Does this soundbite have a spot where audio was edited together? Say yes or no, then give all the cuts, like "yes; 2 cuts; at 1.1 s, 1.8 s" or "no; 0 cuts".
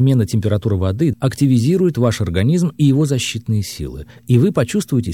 yes; 1 cut; at 1.1 s